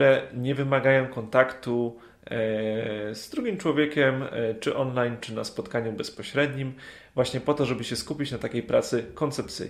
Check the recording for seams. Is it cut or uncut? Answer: uncut